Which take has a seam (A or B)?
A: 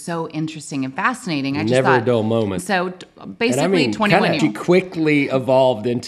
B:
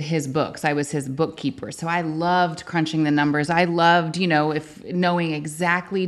A